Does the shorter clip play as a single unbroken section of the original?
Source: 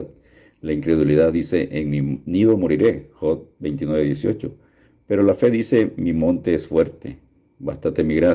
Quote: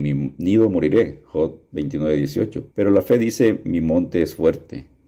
no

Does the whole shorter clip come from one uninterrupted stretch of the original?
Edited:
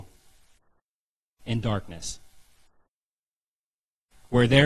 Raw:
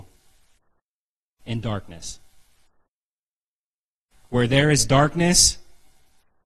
yes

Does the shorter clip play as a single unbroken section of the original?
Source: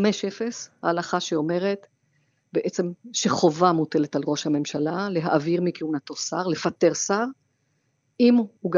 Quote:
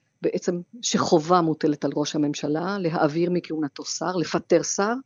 yes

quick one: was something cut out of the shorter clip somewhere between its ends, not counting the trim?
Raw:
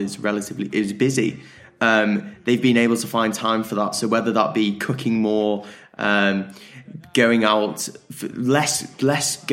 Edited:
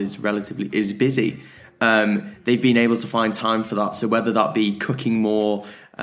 no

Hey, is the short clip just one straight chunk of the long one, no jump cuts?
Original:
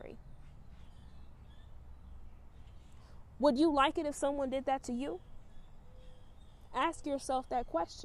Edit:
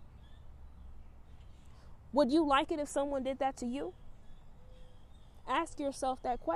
yes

